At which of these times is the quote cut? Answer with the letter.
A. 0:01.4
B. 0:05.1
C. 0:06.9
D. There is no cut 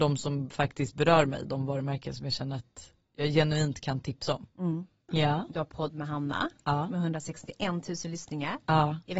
B